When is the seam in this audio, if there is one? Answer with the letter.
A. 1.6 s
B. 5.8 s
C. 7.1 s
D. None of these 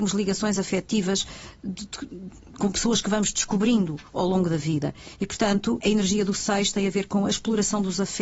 B